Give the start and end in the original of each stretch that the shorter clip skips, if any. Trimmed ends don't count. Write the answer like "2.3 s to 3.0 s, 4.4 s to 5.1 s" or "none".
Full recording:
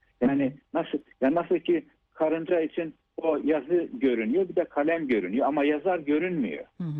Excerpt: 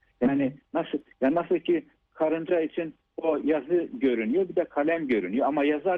none